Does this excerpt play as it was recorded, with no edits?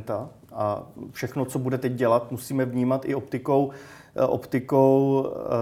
yes; 0 cuts

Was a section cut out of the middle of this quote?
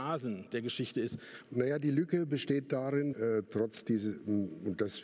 yes; 2 cuts; at 1.4 s, 3.1 s

